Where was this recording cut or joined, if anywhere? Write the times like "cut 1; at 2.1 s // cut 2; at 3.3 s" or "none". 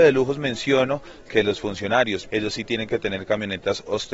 cut 1; at 2.2 s